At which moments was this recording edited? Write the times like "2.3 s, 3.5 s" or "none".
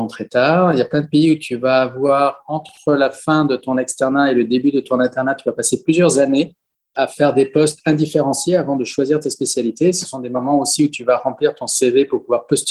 none